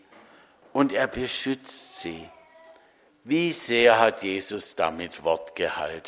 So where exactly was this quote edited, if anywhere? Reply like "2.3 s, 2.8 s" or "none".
3.1 s